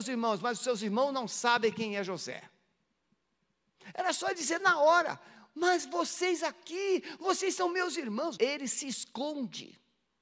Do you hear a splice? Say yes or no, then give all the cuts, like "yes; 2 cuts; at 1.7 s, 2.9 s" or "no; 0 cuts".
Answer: yes; 1 cut; at 8.4 s